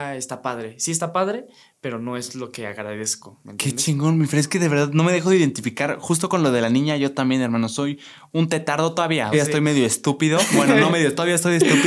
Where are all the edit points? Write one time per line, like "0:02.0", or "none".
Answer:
0:09.3